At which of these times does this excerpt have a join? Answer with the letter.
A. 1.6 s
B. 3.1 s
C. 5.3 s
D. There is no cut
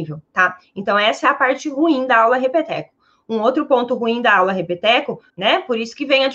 C